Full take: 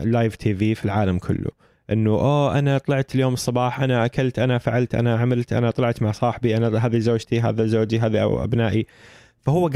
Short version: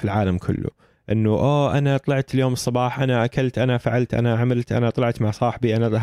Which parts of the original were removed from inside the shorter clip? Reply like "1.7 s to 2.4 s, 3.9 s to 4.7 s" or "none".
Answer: none